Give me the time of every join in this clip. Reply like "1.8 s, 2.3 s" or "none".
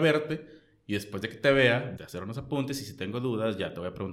2.0 s